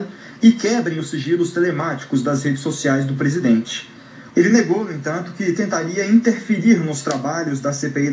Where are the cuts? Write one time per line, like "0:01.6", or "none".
0:04.3